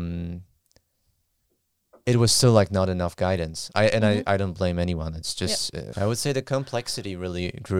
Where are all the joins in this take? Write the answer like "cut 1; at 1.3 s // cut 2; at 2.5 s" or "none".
cut 1; at 5.9 s